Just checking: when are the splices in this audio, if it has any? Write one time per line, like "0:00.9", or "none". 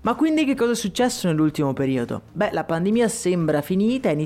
none